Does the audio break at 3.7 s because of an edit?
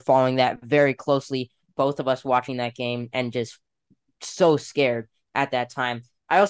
no; 1 cut; at 1.7 s

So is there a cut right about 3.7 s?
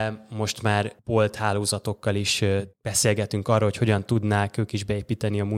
no; 0 cuts

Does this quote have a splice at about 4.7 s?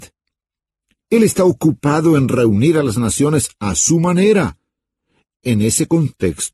no; 0 cuts

